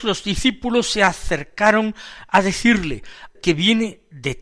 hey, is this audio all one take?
no; 1 cut; at 3.3 s

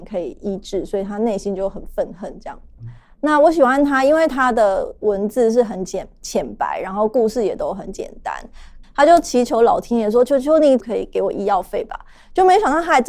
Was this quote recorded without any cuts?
no; 3 cuts; at 2.8 s, 8.8 s, 10.8 s

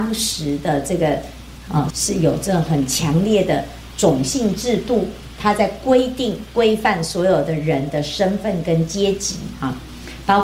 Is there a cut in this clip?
yes; 1 cut; at 1.9 s

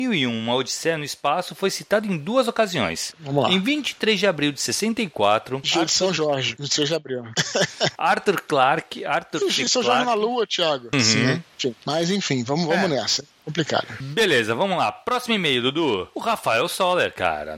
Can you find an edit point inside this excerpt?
yes; 2 cuts; at 3.1 s, 10.9 s

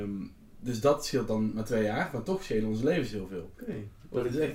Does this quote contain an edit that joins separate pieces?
yes; 1 cut; at 3.6 s

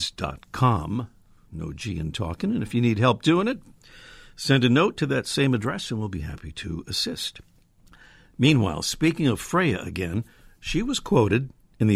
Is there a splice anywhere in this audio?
no; 0 cuts

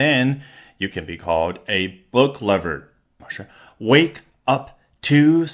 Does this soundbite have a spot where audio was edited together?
yes; 1 cut; at 3.2 s

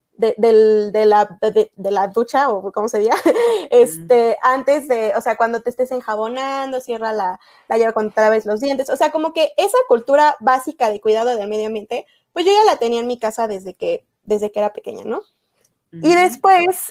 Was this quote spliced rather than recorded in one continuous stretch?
no; 0 cuts

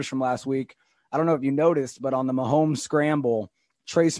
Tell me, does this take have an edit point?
no; 0 cuts

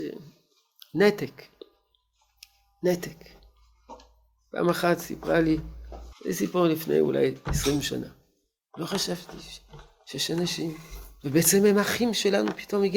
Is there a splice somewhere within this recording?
yes; 2 cuts; at 6.1 s, 8.6 s

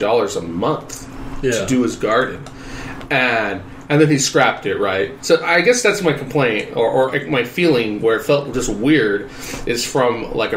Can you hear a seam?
yes; 2 cuts; at 5.2 s, 7.1 s

